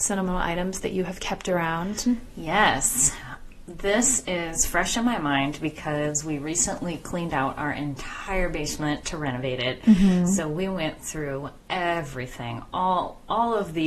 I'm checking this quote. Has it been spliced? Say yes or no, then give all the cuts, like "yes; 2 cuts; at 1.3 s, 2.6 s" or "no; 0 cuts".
no; 0 cuts